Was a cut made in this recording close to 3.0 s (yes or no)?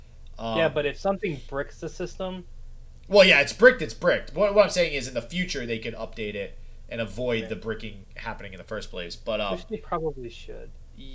no